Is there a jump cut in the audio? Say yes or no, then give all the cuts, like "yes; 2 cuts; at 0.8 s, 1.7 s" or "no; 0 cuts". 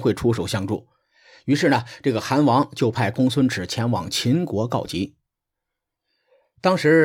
no; 0 cuts